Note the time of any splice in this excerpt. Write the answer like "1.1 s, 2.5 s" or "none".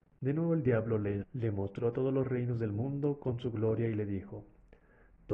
1.2 s